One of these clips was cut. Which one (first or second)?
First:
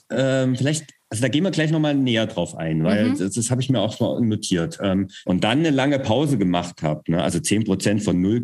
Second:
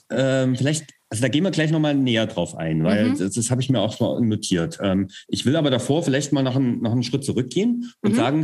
first